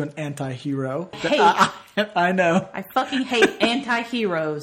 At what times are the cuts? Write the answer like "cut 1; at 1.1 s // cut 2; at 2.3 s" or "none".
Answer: cut 1; at 1.1 s